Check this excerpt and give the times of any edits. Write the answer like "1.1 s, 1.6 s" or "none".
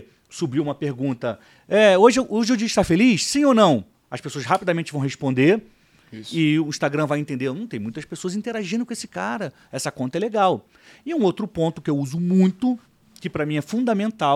none